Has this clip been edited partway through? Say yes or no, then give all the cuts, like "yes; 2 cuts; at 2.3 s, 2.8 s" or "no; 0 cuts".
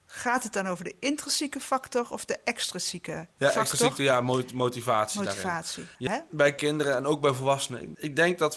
yes; 1 cut; at 6.1 s